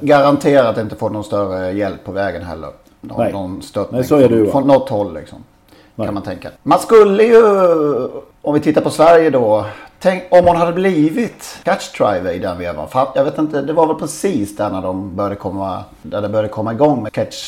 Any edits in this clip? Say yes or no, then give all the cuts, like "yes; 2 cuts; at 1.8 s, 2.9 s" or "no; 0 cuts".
yes; 1 cut; at 4.6 s